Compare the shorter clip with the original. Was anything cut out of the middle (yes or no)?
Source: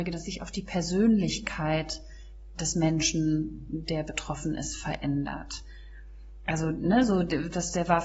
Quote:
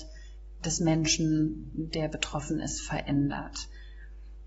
no